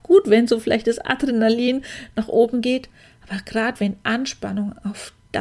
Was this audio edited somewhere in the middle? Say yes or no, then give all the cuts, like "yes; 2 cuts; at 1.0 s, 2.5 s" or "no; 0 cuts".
no; 0 cuts